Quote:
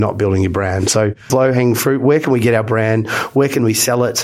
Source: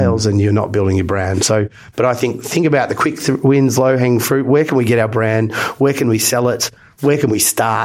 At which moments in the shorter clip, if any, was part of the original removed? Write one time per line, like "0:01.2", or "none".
0:01.3